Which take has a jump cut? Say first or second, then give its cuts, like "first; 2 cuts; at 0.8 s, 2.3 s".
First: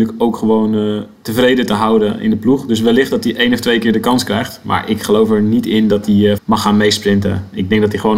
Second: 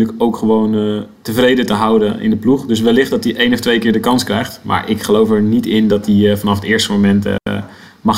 first; 1 cut; at 6.4 s